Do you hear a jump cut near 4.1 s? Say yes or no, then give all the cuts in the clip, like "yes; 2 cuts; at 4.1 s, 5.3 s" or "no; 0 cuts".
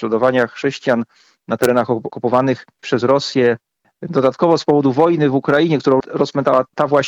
yes; 1 cut; at 4.1 s